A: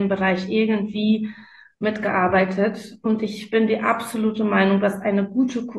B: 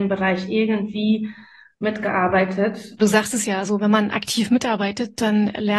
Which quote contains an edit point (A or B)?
B